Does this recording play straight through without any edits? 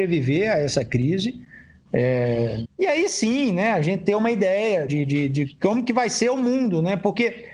no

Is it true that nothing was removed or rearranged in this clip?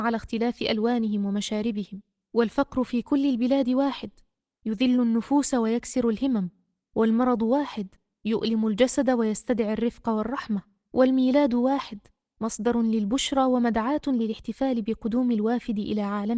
yes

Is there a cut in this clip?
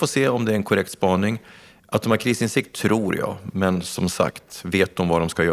no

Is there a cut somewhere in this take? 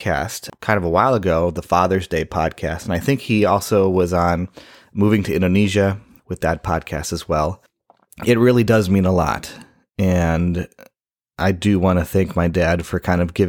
no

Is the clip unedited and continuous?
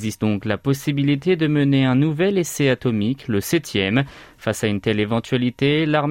yes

